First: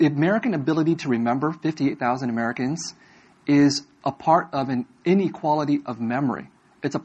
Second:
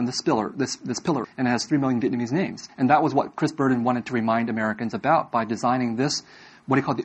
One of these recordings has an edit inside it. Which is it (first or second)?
second